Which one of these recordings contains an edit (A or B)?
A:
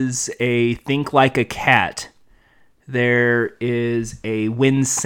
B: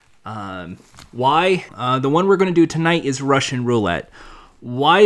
B